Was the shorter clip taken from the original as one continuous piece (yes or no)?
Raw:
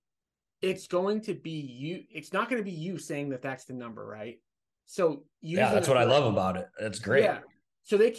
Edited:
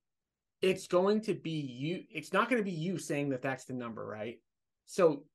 yes